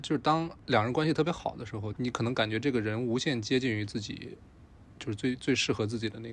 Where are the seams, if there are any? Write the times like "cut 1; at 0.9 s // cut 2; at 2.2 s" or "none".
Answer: cut 1; at 1.9 s